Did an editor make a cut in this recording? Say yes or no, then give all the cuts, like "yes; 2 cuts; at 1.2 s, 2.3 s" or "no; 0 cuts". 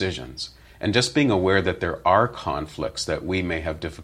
no; 0 cuts